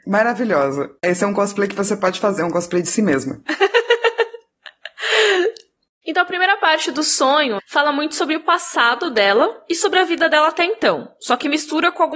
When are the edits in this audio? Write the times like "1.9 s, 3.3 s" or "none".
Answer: 7.6 s